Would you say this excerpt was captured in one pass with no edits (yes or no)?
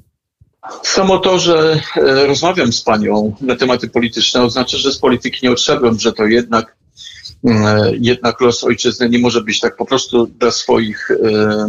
yes